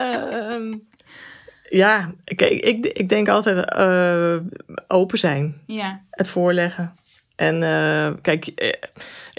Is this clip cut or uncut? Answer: uncut